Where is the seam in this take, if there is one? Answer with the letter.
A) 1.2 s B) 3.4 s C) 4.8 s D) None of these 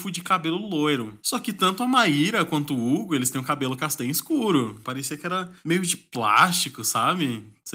C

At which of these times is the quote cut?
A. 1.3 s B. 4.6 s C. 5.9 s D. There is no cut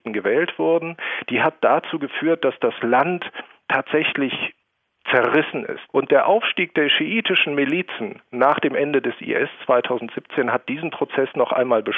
C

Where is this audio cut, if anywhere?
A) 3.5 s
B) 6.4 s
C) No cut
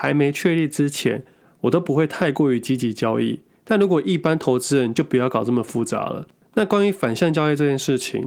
C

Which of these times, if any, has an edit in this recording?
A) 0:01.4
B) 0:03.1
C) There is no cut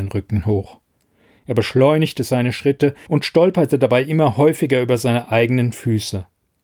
B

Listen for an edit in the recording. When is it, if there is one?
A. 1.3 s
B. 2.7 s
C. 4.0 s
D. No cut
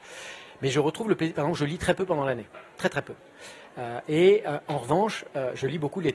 D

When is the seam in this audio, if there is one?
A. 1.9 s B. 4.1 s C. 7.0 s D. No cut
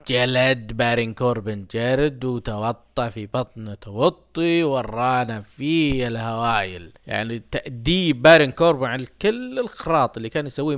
C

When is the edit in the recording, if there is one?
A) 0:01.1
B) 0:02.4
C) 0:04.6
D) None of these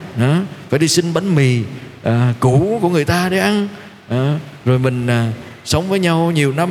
D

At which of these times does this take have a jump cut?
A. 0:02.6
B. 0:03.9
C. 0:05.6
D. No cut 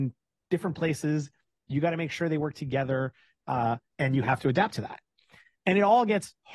B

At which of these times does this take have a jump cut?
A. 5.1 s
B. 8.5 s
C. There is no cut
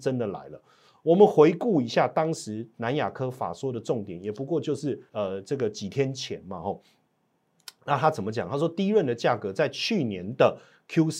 A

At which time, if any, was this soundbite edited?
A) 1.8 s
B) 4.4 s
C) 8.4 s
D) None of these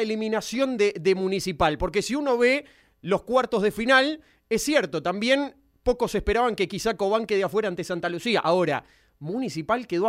D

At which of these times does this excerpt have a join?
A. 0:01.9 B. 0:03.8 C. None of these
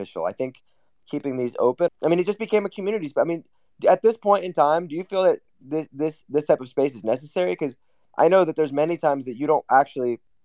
A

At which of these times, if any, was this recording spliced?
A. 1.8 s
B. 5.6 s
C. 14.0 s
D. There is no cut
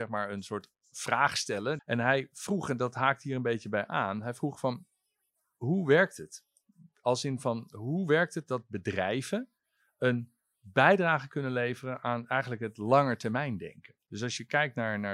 A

